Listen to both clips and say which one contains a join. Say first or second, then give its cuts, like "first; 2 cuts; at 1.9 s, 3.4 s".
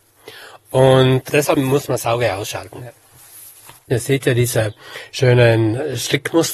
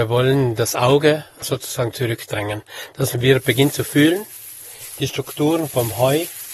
first; 2 cuts; at 1.5 s, 3.8 s